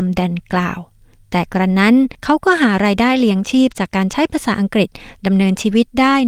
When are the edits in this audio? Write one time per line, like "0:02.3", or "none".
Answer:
none